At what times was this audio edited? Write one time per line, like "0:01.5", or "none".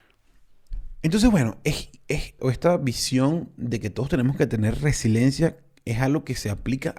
0:02.4

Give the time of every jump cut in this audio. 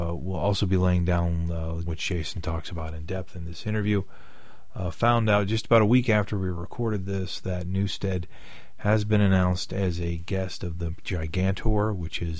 0:01.9

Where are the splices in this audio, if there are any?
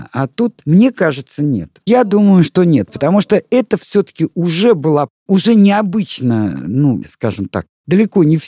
0:01.8
0:07.0

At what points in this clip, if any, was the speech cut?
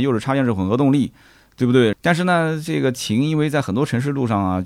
0:01.9

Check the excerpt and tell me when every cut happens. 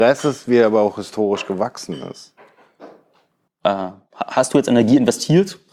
0:03.5

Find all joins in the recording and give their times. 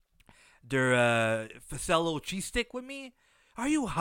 none

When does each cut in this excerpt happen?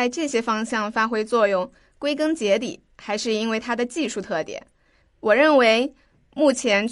0:05.0

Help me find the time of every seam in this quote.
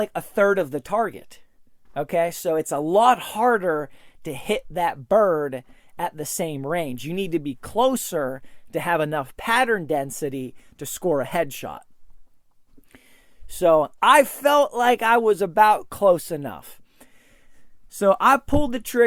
none

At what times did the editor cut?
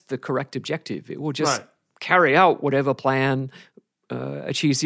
none

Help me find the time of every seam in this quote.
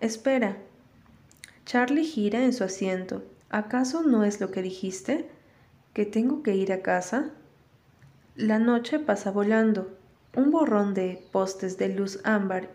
0:03.4

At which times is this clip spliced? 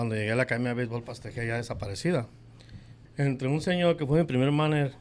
0:03.0

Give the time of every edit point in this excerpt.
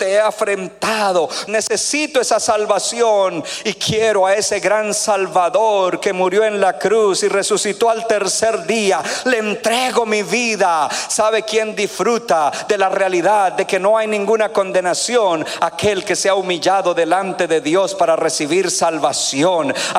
0:01.5

